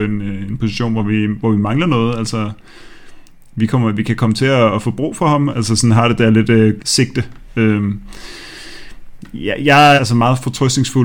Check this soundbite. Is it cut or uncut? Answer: cut